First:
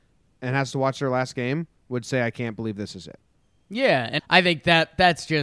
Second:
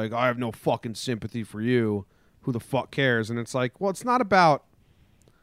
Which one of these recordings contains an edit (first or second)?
first